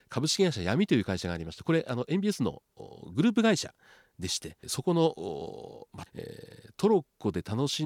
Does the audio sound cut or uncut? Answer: cut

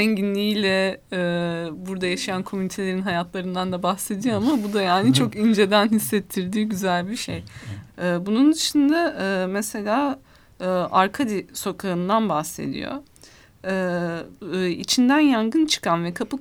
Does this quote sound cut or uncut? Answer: cut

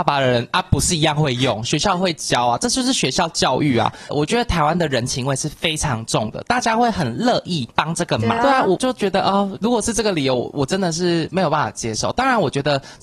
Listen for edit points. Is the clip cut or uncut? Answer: cut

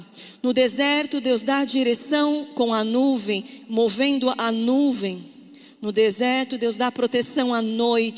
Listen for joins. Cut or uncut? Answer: uncut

